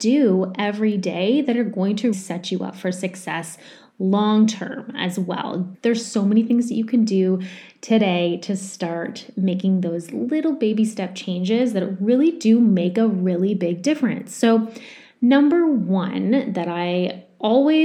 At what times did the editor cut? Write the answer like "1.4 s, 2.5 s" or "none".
2.1 s, 5.7 s